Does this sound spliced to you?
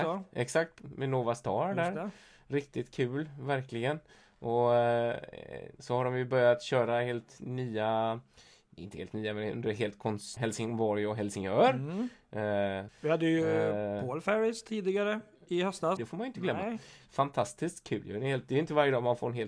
yes; 3 cuts; at 10.4 s, 12.9 s, 16.0 s

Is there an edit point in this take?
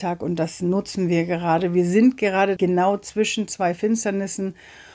yes; 1 cut; at 2.6 s

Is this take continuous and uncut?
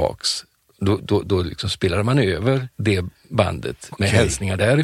no; 2 cuts; at 2.7 s, 3.9 s

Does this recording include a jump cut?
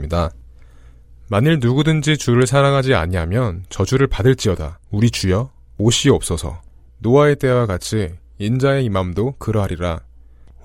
yes; 2 cuts; at 4.8 s, 6.9 s

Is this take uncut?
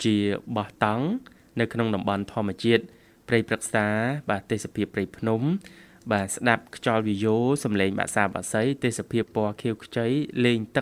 yes; 0 cuts

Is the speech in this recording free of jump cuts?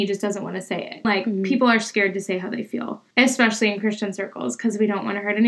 no; 2 cuts; at 1.0 s, 3.1 s

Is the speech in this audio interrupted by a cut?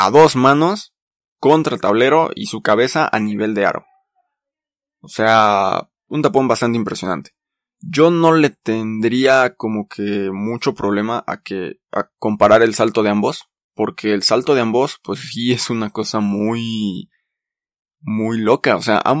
no; 0 cuts

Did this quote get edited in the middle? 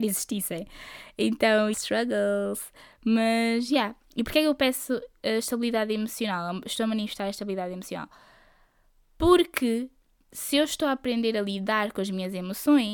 yes; 1 cut; at 1.7 s

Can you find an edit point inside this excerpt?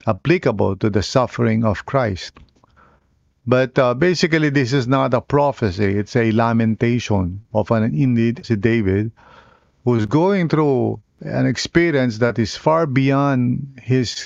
yes; 2 cuts; at 8.4 s, 11.1 s

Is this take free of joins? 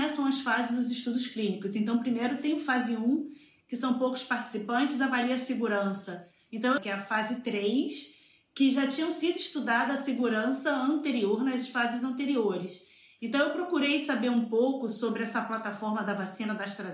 no; 1 cut; at 6.8 s

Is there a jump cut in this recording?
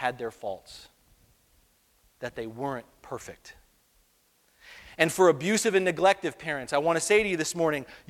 no; 0 cuts

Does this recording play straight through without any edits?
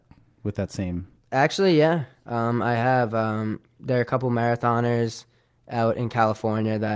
yes; 0 cuts

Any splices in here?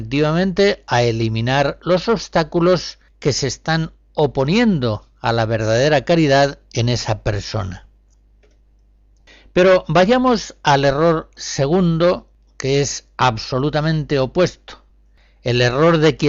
no; 0 cuts

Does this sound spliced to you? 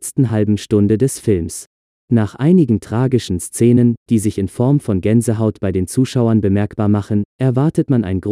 no; 0 cuts

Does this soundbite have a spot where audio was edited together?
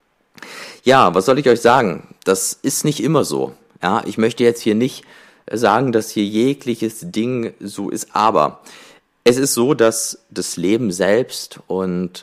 no; 0 cuts

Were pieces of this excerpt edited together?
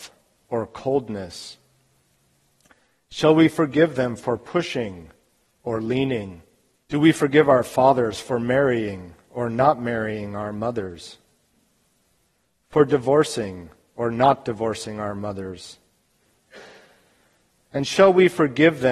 yes; 1 cut; at 6.8 s

